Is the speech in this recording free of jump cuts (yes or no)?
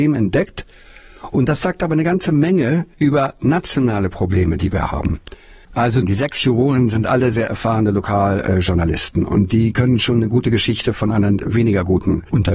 no